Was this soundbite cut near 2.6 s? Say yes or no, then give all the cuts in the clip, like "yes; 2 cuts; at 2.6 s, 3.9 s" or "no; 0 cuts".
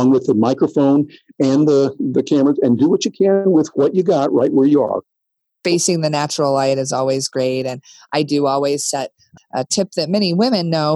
no; 1 cut; at 9.4 s